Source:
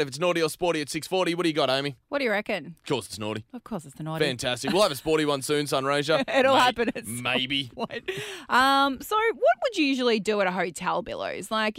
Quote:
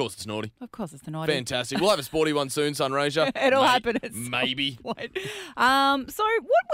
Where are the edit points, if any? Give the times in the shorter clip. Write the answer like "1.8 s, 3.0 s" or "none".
none